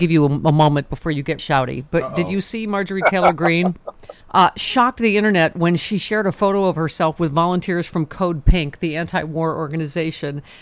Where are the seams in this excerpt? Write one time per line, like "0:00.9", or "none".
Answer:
0:01.4
0:04.2